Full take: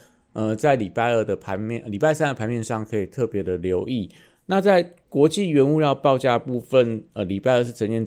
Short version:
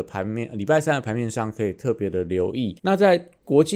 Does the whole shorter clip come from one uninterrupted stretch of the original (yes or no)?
no